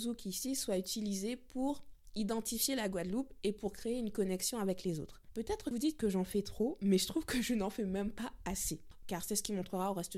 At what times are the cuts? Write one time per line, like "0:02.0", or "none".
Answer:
0:05.7
0:09.0